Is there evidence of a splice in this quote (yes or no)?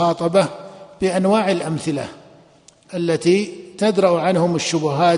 no